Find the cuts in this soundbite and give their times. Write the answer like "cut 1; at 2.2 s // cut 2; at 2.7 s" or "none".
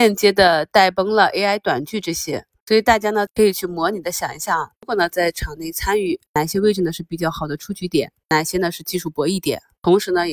cut 1; at 3.3 s